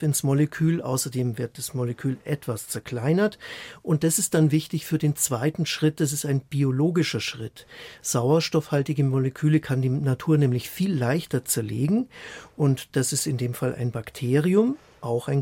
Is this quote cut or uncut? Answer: uncut